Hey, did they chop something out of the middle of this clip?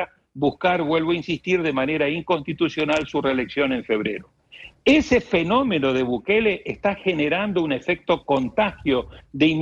no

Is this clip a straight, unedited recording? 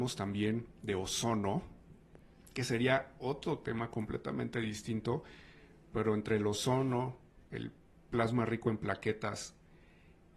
yes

